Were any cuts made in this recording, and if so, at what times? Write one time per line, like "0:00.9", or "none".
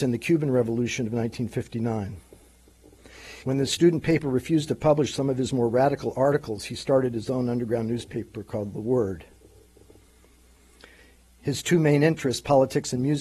0:03.4